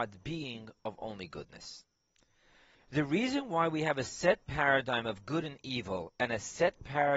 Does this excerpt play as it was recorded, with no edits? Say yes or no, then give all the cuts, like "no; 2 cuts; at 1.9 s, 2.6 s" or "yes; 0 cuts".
no; 1 cut; at 2.7 s